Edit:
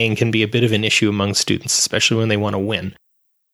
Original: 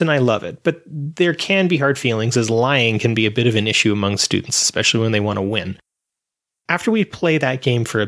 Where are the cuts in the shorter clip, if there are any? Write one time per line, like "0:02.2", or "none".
none